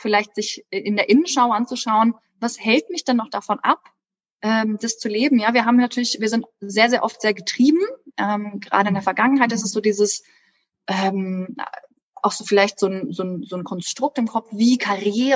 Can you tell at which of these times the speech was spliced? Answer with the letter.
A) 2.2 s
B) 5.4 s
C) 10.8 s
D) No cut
D